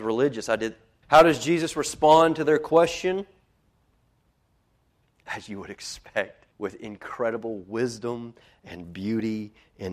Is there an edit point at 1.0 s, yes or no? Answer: yes